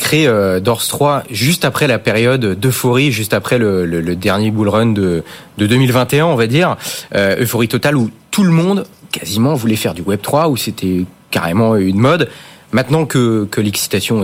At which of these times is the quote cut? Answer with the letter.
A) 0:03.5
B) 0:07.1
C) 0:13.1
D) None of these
D